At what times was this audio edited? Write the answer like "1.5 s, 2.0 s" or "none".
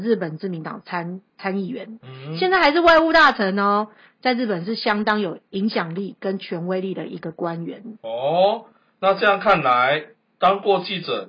2.0 s